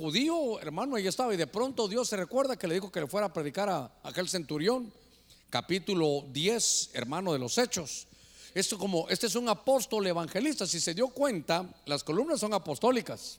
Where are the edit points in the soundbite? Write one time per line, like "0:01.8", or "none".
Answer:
0:08.5